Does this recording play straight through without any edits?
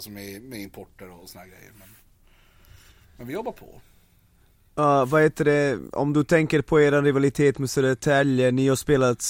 yes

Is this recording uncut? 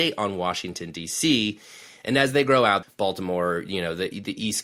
no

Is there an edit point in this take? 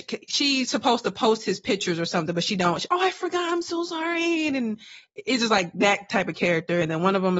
no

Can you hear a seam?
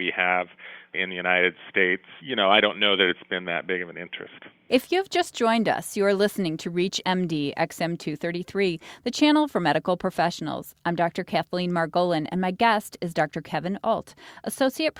no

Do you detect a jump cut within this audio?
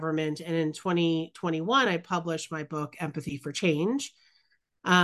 no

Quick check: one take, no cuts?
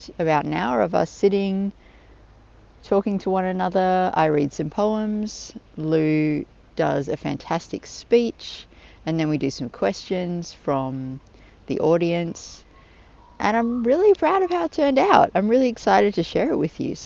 yes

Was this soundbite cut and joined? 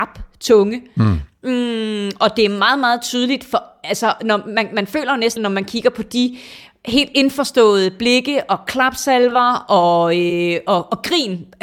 yes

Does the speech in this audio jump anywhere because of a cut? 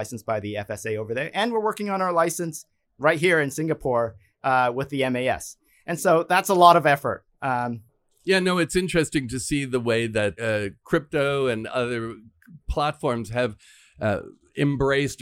yes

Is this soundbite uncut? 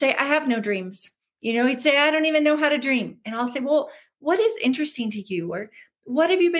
yes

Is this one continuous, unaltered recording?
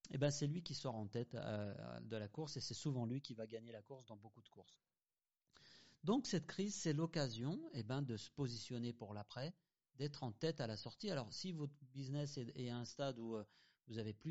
yes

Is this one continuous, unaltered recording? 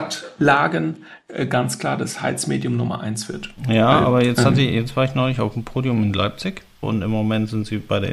no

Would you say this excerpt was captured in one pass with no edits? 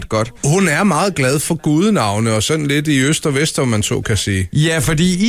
yes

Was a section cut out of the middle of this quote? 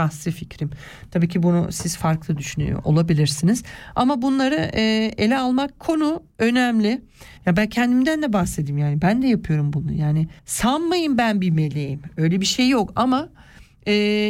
yes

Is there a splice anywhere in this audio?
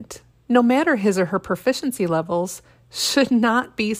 no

